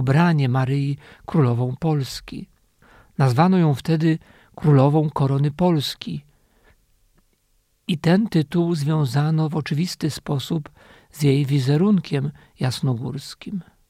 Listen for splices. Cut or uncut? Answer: uncut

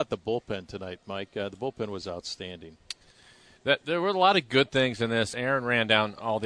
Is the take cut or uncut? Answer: uncut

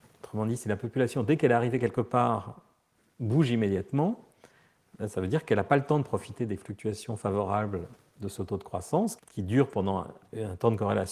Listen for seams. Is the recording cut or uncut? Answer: cut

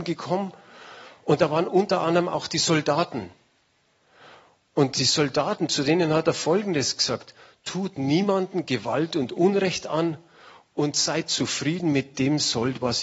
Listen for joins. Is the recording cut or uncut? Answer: uncut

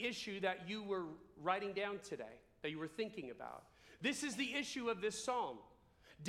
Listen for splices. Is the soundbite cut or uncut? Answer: uncut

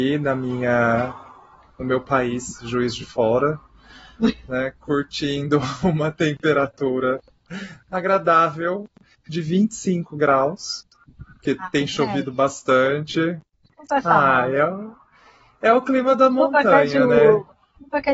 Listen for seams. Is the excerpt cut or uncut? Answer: uncut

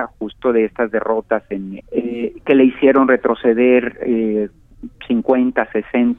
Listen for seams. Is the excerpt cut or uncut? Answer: cut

